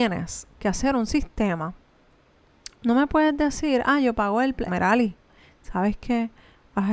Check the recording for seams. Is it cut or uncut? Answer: cut